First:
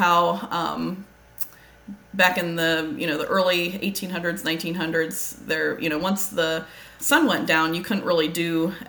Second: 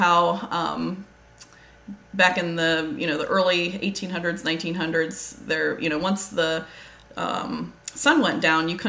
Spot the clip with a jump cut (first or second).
first